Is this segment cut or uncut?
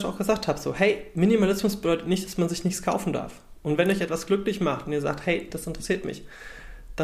uncut